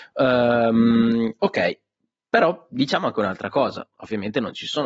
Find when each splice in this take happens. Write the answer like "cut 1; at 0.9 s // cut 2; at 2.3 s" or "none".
none